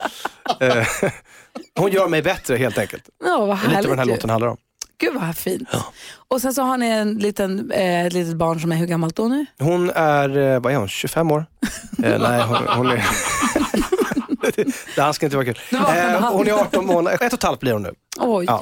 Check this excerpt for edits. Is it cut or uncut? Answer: cut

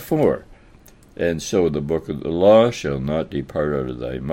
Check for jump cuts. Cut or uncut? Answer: cut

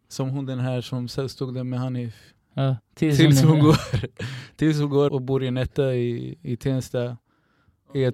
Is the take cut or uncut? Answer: cut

